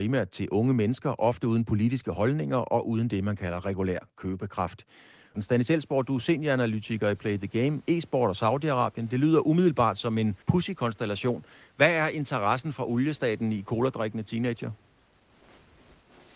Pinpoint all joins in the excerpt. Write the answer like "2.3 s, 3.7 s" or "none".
5.3 s, 10.4 s